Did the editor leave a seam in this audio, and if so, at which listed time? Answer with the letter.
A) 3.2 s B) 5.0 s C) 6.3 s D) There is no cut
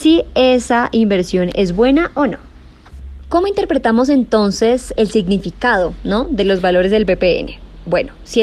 B